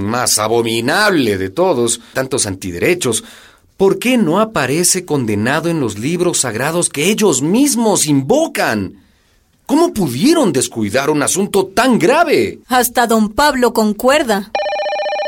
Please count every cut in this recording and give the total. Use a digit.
2